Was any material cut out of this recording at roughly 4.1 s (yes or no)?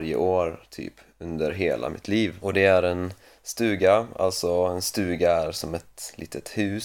no